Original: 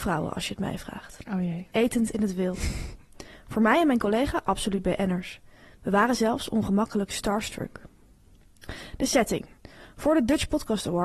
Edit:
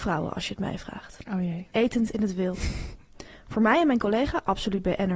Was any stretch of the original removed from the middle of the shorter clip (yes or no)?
no